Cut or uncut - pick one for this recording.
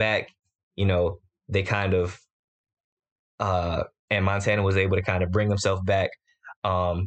cut